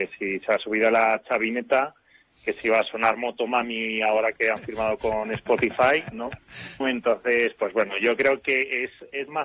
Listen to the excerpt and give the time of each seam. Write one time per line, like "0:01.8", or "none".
0:06.8